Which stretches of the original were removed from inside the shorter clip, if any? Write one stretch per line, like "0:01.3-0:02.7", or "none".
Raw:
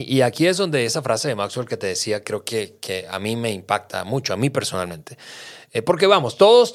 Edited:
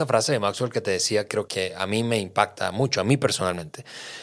0:02.4-0:02.8

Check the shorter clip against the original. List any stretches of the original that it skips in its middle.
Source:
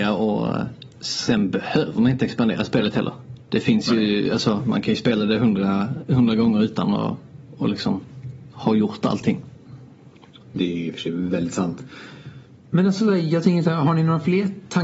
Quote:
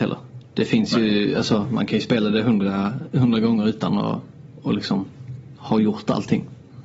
none

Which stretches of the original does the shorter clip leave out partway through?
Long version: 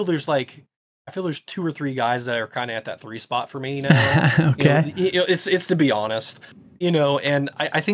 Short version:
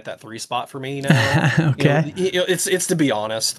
none

